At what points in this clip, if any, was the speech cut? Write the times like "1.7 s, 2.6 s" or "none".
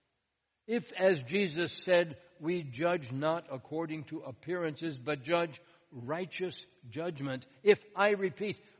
none